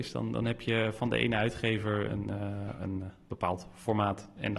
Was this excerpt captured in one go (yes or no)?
no